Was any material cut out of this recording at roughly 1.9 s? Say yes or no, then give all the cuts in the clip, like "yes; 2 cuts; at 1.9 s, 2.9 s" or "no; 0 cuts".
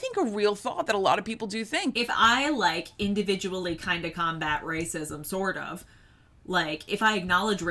yes; 1 cut; at 1.9 s